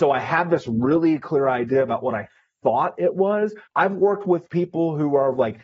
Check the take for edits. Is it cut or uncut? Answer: cut